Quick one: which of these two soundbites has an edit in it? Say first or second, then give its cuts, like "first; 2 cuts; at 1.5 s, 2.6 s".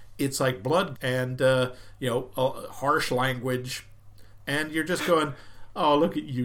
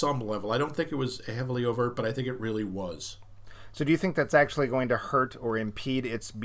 first; 2 cuts; at 0.9 s, 4.5 s